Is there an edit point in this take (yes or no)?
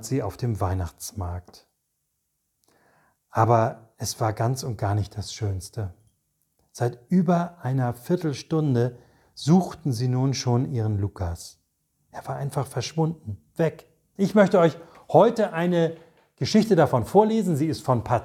yes